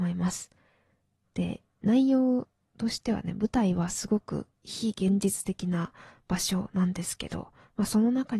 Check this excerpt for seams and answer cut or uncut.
cut